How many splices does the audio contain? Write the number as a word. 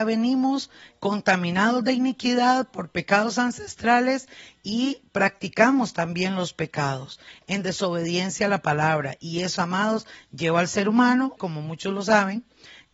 two